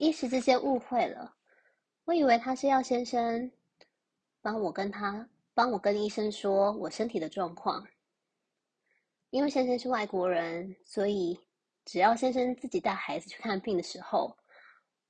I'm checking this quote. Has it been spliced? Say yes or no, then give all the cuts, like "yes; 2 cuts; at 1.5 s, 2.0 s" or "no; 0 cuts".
no; 0 cuts